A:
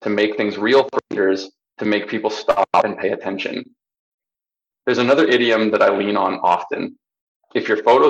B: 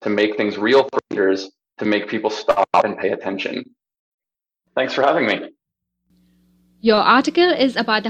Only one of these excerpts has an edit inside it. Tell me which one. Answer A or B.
B